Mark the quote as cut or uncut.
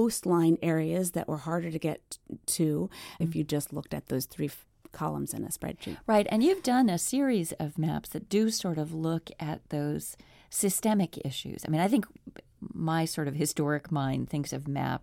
cut